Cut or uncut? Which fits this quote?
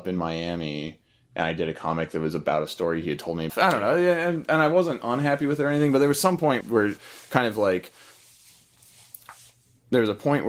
cut